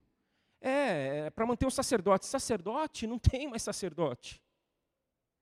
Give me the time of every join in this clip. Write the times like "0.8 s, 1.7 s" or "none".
none